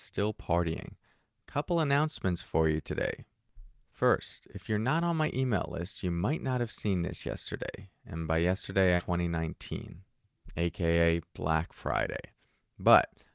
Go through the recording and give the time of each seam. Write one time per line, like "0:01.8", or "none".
0:09.0